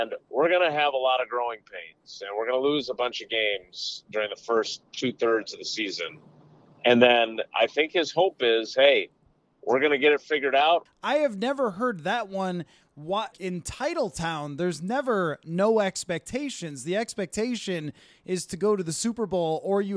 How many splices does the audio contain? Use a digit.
2